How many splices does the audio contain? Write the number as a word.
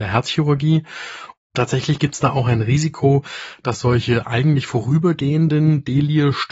one